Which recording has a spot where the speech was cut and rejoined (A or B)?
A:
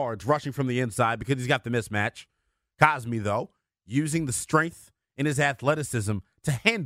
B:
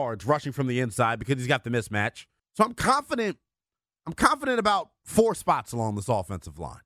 B